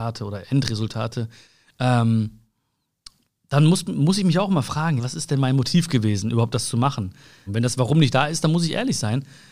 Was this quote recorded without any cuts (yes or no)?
no